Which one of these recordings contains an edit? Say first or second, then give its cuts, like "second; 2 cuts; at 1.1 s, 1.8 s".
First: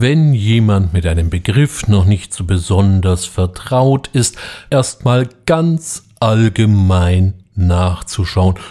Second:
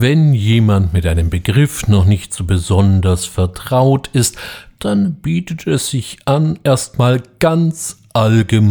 first; 1 cut; at 4.7 s